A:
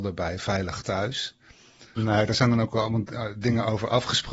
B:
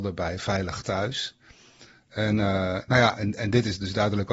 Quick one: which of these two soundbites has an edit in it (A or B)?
A